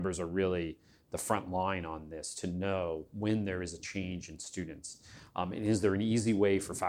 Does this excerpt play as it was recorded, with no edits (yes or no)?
yes